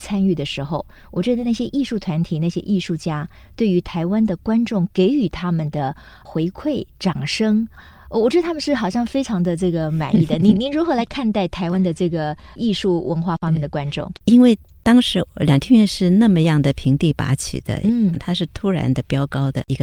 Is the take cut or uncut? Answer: cut